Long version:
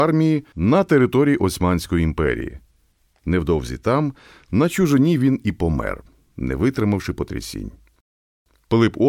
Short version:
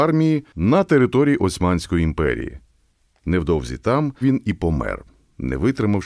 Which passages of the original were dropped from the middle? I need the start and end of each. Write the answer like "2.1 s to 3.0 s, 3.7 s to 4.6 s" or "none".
4.2 s to 5.2 s